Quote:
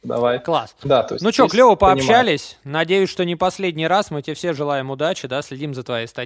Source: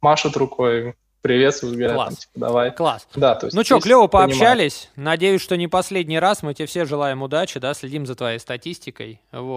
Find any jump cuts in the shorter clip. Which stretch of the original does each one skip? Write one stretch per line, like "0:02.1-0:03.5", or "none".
none